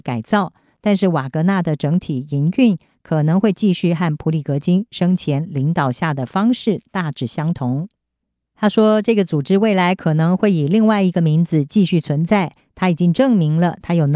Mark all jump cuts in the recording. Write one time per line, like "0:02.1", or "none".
none